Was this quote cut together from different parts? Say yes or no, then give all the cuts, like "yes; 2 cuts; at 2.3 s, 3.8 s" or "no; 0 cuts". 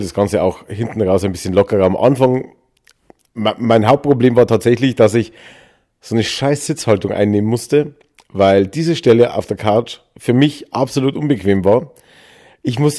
no; 0 cuts